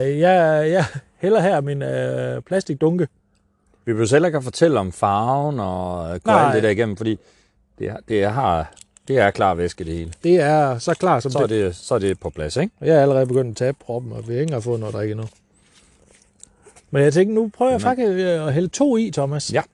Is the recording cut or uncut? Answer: uncut